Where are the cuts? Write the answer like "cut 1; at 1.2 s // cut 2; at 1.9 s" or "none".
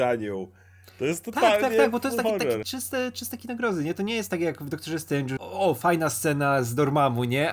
cut 1; at 2.6 s // cut 2; at 5.4 s